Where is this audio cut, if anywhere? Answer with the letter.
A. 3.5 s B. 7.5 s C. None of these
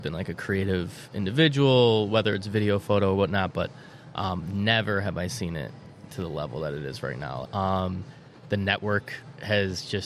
B